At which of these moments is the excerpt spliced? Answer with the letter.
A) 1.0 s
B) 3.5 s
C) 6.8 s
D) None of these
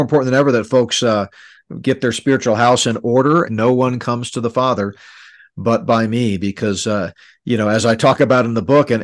B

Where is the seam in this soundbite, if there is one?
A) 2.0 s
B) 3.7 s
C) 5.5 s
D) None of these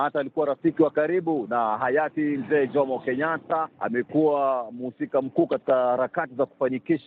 B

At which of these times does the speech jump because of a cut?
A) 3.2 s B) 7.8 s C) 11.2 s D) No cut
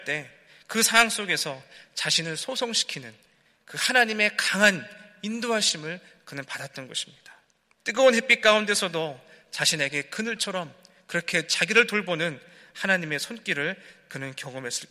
B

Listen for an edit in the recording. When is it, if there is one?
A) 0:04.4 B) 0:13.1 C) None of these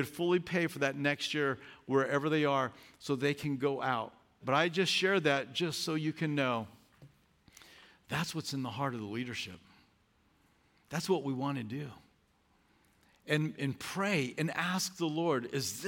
A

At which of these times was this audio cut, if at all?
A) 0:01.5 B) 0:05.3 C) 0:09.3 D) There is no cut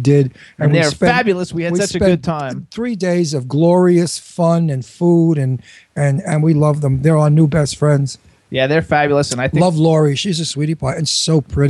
D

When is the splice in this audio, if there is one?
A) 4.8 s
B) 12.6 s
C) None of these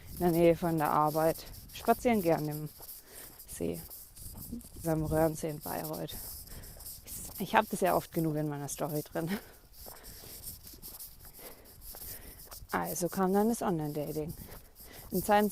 A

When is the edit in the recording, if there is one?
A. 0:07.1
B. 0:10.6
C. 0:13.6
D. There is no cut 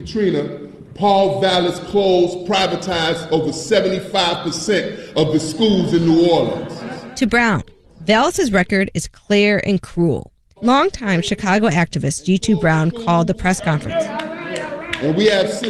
B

